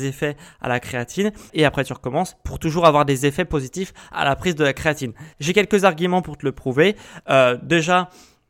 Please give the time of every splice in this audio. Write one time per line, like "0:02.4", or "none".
0:01.5
0:05.3